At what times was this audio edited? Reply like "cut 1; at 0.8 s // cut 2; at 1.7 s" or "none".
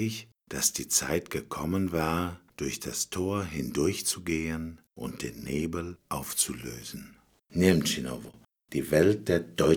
cut 1; at 7.4 s